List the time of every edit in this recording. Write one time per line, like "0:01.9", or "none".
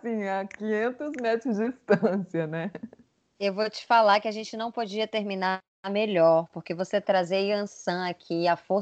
none